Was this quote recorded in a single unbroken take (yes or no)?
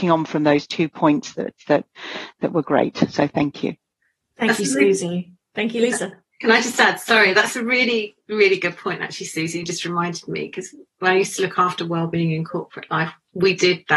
yes